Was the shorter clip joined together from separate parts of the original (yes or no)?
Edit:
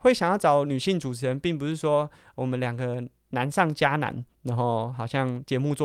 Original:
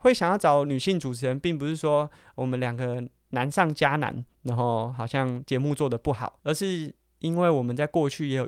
no